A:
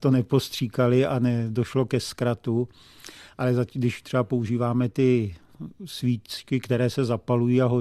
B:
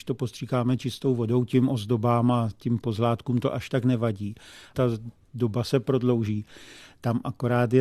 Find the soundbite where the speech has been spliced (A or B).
B